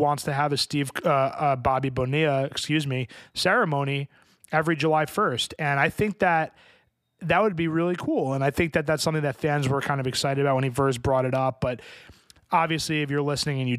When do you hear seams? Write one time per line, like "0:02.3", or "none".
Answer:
none